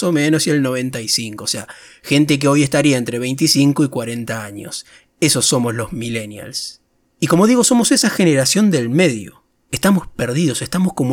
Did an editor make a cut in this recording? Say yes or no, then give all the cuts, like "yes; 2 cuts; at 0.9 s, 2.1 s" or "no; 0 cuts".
no; 0 cuts